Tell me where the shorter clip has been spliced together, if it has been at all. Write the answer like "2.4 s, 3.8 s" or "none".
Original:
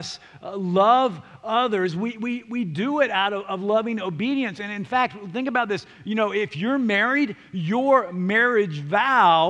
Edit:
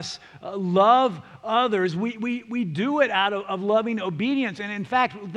none